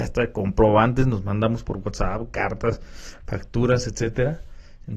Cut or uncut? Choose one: uncut